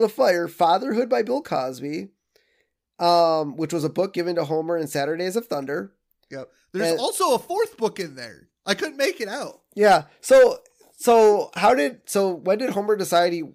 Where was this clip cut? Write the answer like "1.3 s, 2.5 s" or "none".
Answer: none